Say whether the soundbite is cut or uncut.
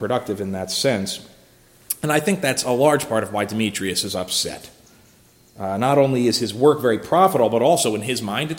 uncut